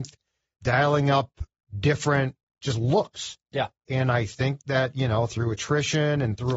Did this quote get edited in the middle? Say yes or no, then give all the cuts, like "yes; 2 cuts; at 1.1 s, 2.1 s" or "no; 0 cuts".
yes; 2 cuts; at 2.6 s, 3.9 s